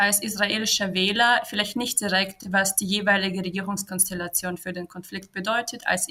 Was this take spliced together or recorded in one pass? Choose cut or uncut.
uncut